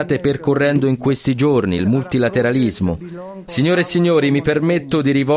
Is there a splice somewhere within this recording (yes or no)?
yes